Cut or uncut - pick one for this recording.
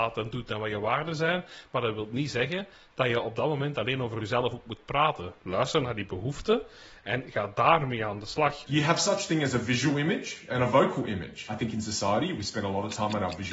cut